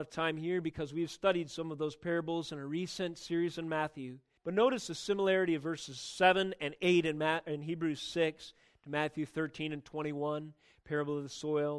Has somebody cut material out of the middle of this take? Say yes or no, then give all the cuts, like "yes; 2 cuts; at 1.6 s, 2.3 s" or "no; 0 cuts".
yes; 1 cut; at 4.4 s